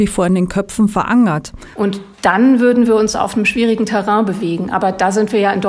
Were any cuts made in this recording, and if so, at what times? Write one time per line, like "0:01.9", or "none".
0:01.7